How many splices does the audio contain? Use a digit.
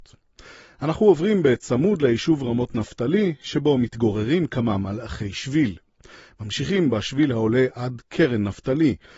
0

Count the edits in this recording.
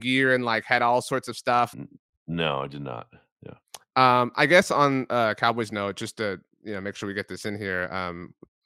1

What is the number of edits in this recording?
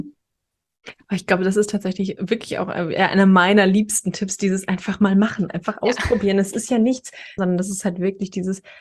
1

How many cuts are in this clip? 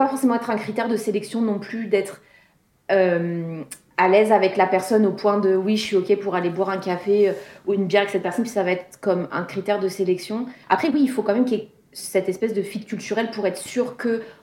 1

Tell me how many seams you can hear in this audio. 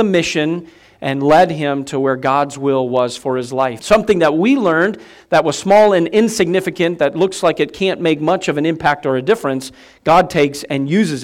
1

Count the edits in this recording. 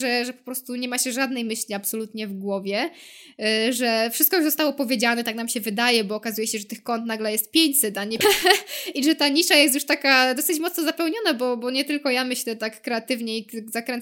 1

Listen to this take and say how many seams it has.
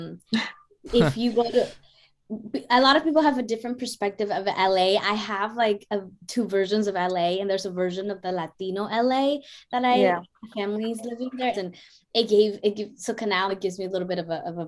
2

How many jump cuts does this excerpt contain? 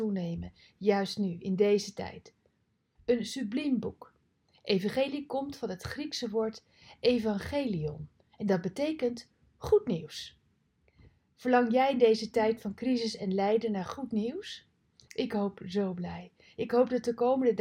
2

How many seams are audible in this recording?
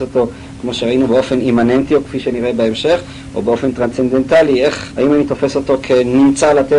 1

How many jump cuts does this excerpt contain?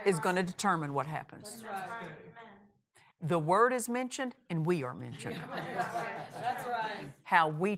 1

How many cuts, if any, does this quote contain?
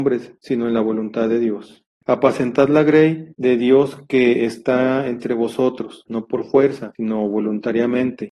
2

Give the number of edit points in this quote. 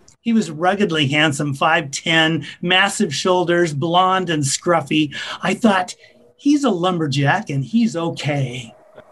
0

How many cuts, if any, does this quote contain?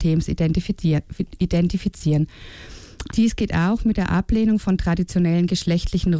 1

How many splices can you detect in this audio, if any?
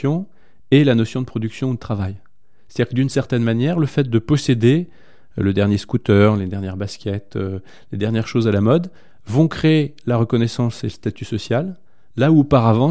0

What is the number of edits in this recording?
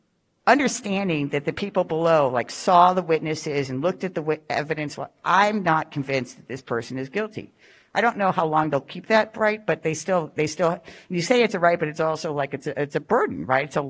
0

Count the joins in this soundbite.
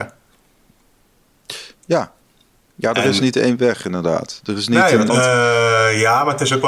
1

